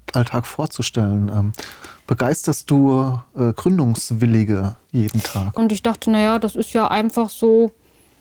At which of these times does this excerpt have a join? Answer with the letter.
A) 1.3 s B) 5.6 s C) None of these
B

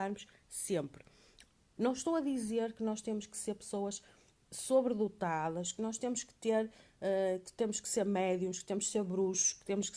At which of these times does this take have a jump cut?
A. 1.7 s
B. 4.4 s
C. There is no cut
A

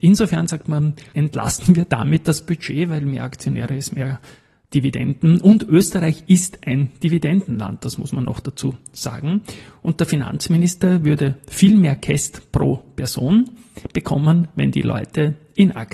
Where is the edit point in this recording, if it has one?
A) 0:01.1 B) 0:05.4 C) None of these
A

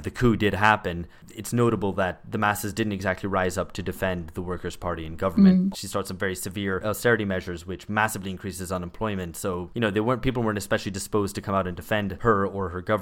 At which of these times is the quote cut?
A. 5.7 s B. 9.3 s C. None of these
A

